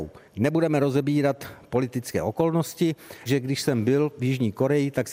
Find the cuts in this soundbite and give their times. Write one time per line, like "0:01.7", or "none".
0:03.3